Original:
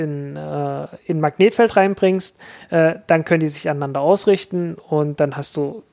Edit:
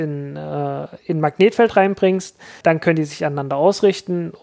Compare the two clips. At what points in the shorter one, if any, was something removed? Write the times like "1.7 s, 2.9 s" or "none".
2.6 s